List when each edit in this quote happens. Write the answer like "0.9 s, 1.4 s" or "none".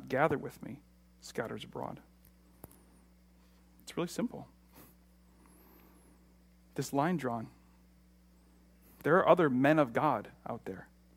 none

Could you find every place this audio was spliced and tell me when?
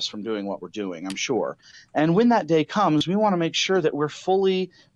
none

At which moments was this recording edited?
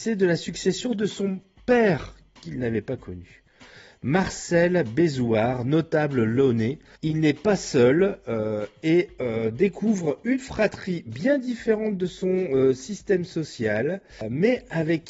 none

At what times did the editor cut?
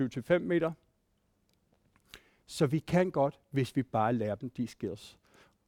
none

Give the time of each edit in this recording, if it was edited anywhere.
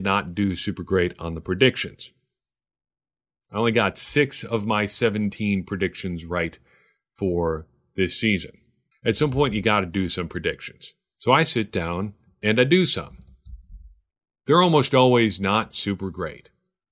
8.9 s

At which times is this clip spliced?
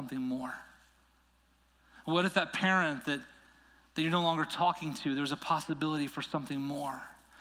none

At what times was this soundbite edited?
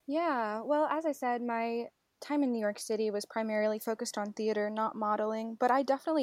none

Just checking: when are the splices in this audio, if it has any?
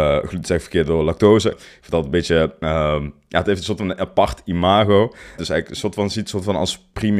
1.5 s, 5.4 s

